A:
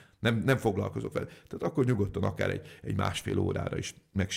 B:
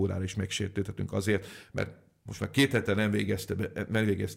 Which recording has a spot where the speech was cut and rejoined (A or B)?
B